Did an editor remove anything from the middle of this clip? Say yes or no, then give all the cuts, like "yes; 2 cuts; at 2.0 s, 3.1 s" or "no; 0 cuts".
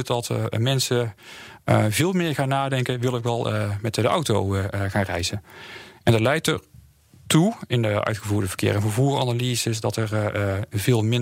no; 0 cuts